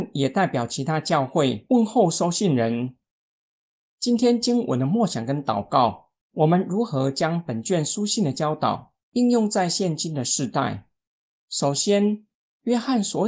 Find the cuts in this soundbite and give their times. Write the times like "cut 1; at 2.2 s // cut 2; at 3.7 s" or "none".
cut 1; at 6.3 s